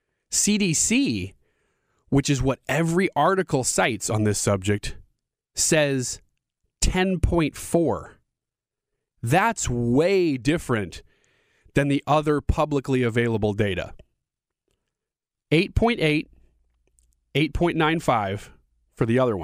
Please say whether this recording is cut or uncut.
uncut